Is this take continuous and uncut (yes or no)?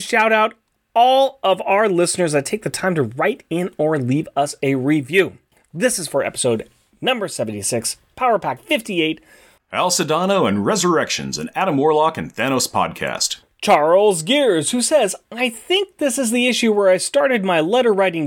no